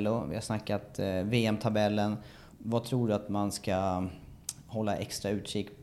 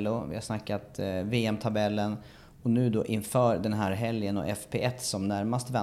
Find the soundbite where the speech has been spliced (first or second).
first